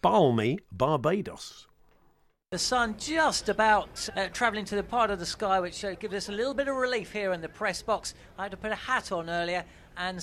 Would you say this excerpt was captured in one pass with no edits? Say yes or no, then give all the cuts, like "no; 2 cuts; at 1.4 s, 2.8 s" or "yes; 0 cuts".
no; 1 cut; at 4.1 s